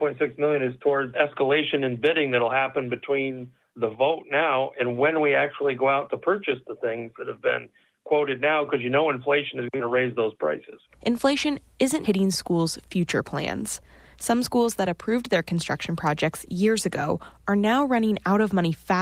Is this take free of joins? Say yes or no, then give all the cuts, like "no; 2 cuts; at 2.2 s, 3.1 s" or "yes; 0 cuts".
no; 1 cut; at 12.0 s